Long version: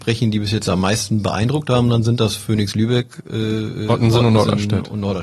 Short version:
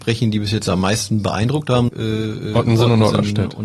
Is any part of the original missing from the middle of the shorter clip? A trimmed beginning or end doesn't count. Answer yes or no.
yes